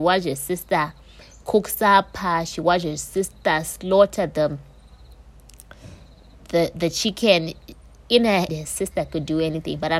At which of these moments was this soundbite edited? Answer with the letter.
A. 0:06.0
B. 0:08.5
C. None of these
B